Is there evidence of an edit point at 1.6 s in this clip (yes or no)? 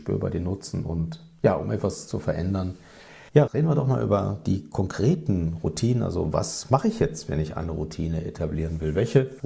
no